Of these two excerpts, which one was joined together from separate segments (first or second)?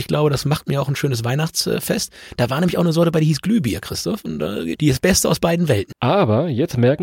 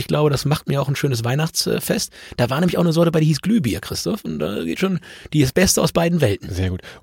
first